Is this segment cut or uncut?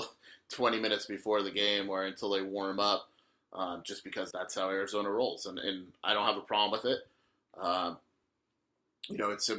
cut